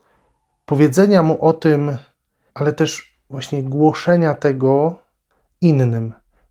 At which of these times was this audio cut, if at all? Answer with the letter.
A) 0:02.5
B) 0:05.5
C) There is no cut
A